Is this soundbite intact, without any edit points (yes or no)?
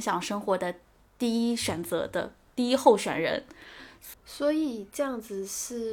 no